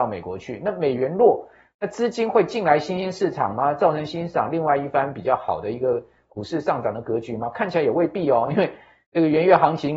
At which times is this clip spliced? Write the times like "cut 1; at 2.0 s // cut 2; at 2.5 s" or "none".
none